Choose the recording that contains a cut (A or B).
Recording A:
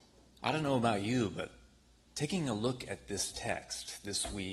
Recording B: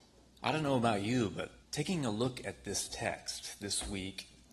B